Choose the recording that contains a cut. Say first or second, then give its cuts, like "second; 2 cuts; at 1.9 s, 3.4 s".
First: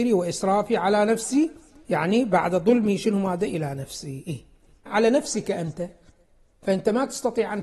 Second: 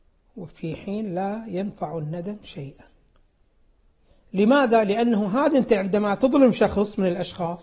first; 1 cut; at 4.9 s